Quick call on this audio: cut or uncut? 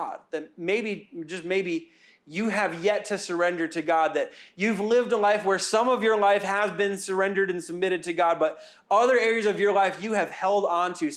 uncut